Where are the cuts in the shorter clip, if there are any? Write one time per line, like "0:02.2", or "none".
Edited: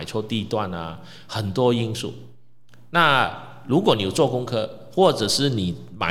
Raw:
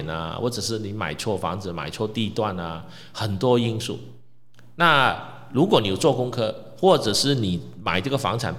none